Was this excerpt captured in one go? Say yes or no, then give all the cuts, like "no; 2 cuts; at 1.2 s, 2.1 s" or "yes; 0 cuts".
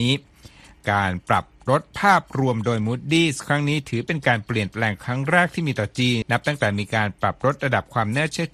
no; 1 cut; at 6.2 s